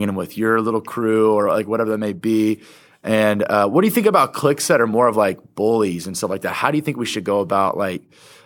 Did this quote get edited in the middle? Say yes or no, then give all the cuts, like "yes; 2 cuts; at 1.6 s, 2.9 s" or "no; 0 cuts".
no; 0 cuts